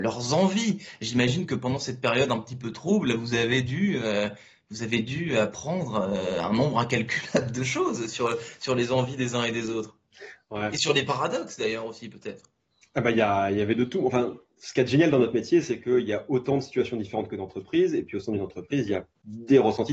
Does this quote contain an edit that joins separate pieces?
no; 0 cuts

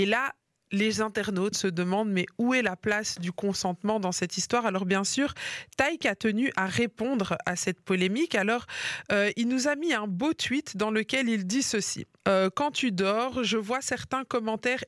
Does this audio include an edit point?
yes; 2 cuts; at 1.5 s, 12.2 s

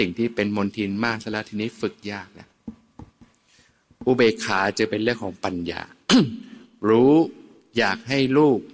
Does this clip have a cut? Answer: no; 0 cuts

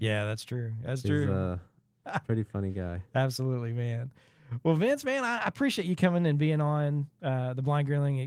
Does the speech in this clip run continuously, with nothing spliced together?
no; 1 cut; at 2.0 s

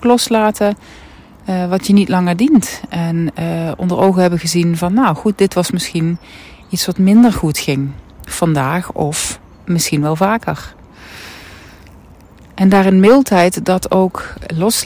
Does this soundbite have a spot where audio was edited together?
no; 0 cuts

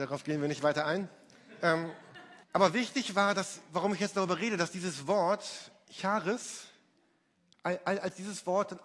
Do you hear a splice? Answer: yes; 1 cut; at 2.4 s

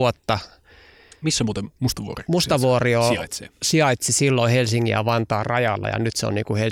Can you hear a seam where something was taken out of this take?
no; 0 cuts

